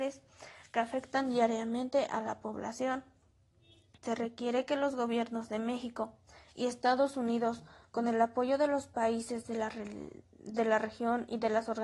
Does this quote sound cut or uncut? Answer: cut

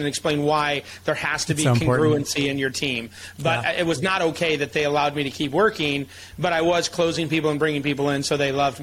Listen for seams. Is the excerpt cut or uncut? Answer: uncut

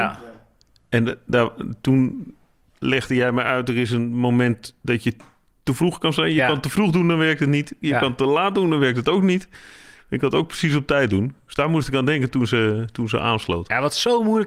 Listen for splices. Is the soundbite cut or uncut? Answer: uncut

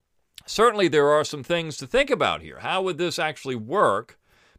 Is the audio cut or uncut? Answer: uncut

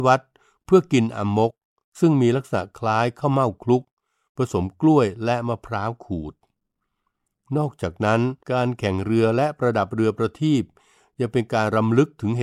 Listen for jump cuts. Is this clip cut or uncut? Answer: cut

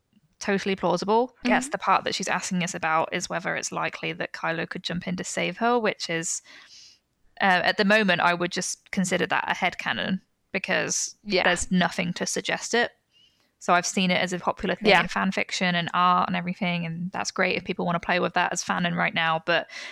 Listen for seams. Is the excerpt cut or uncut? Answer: cut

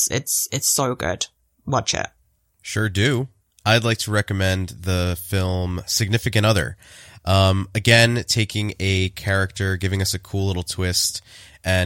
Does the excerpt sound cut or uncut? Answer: cut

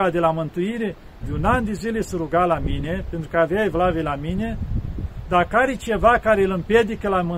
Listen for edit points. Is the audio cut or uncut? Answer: cut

